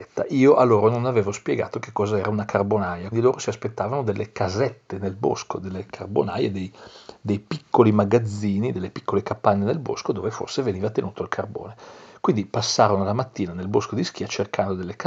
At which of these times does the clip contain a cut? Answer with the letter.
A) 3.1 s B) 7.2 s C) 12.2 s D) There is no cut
A